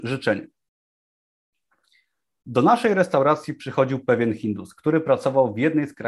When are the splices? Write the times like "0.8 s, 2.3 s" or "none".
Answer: none

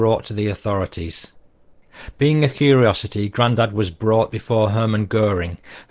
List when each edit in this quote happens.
2.1 s

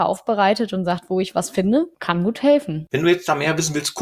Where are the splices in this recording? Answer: 2.9 s

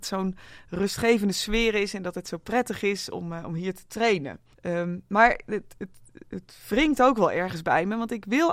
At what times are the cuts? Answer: 4.5 s

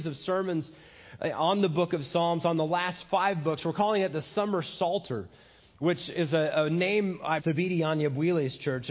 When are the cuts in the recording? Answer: 7.4 s

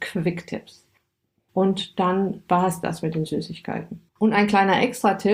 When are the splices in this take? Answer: 1.5 s

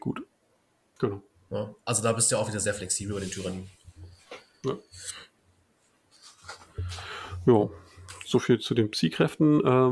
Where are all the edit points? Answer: 1.0 s

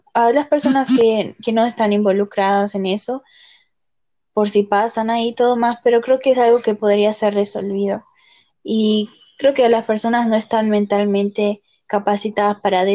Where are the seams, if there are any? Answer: 8.5 s

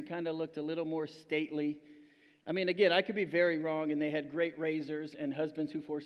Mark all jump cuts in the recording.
none

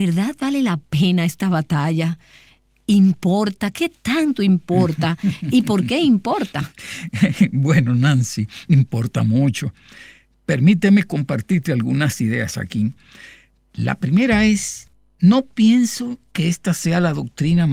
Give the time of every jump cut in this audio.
none

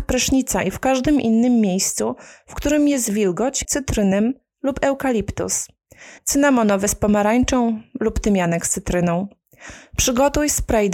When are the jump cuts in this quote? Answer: 3.6 s, 6.2 s

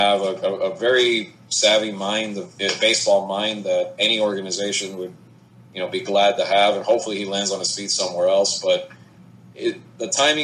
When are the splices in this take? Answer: none

